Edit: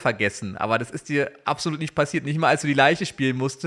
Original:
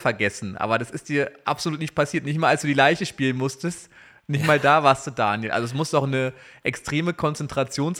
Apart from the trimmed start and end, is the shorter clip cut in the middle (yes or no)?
no